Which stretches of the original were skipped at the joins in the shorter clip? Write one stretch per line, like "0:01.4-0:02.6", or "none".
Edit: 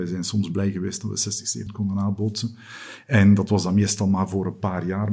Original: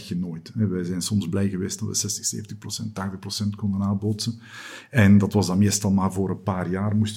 0:02.4-0:03.5

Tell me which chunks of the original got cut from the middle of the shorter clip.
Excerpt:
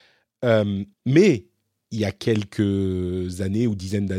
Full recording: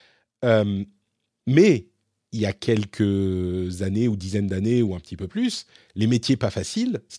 0:00.9-0:01.3

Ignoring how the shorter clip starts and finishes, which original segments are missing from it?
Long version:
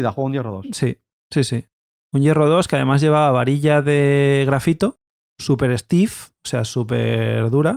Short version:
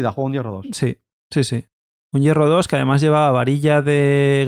none

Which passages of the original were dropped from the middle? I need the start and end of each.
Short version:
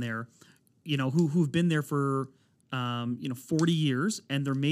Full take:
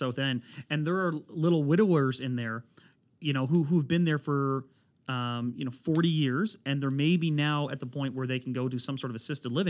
none

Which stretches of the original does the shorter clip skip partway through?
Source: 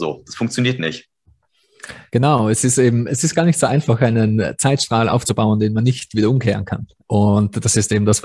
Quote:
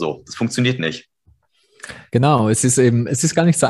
none

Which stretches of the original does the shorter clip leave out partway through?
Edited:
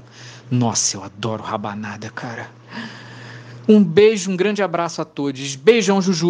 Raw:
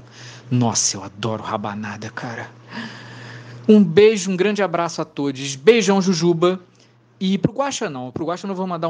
none

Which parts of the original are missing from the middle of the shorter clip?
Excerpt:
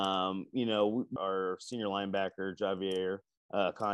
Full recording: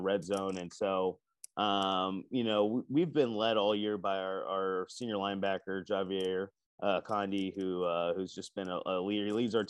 0:02.9-0:04.5

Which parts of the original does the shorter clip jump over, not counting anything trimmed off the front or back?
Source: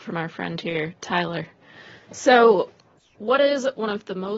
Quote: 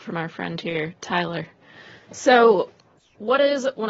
none

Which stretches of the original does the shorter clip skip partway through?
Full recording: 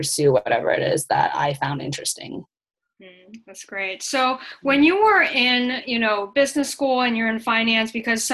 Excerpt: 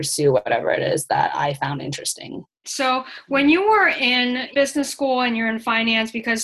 0:02.6-0:04.0
0:05.9-0:06.3

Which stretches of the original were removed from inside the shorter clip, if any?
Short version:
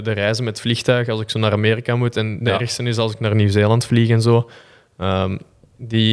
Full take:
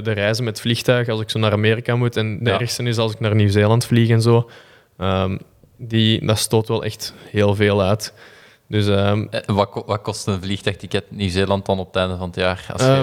none

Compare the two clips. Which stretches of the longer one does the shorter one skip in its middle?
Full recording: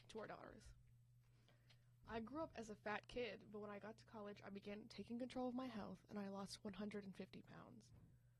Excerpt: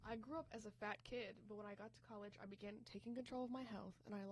none

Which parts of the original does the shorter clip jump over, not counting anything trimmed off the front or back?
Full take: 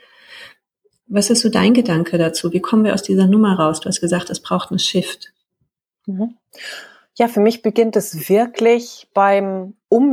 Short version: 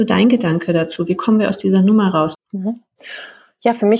0:03.8-0:05.9

